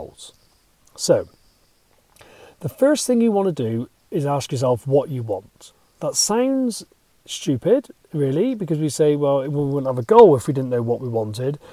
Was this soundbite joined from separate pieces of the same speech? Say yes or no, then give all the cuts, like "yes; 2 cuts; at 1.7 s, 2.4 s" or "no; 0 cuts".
no; 0 cuts